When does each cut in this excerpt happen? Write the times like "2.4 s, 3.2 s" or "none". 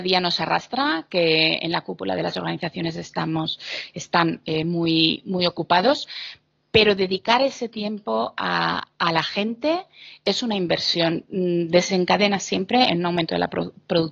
none